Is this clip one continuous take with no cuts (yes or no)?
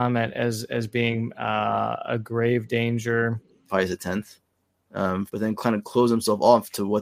no